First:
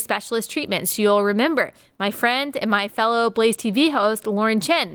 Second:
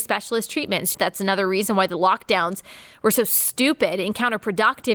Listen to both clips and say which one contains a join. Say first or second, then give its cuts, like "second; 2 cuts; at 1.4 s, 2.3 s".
second; 1 cut; at 0.9 s